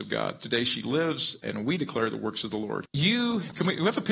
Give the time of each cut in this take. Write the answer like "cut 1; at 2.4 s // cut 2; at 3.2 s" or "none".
cut 1; at 2.9 s